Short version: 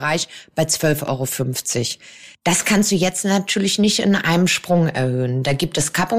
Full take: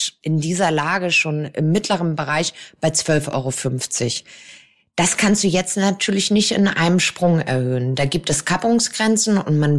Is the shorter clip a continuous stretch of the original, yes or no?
no